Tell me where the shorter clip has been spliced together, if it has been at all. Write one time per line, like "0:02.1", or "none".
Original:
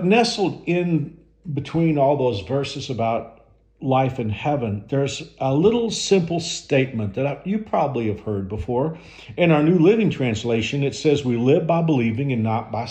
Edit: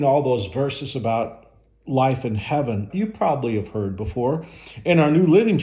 0:02.9